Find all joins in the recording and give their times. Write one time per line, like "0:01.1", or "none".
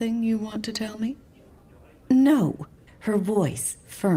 0:02.9

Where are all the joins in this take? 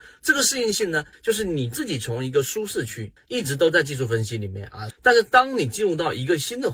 0:01.1
0:03.2
0:04.9

